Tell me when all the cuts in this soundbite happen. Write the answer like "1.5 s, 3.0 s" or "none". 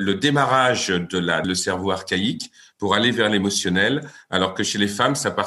1.4 s